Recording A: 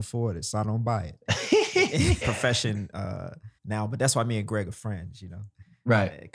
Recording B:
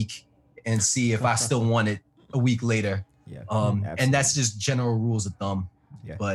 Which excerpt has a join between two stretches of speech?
A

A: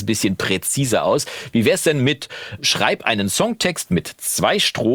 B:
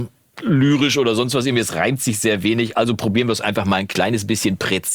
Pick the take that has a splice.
A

